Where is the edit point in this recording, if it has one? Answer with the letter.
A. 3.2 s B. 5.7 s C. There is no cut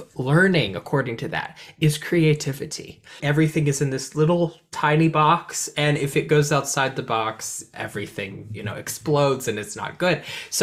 A